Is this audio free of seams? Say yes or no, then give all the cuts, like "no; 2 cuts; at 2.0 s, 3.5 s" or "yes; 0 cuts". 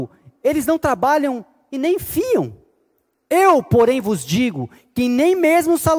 yes; 0 cuts